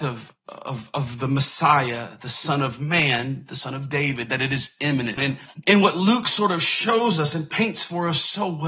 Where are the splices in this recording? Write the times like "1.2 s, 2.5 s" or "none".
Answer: 5.2 s